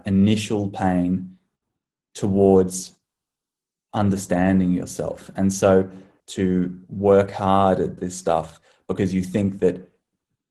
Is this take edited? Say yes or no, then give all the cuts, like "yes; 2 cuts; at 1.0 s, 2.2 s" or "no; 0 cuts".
yes; 1 cut; at 6.2 s